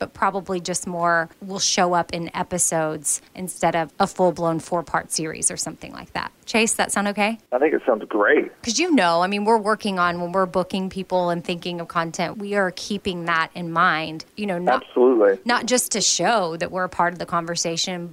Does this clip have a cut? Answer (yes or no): yes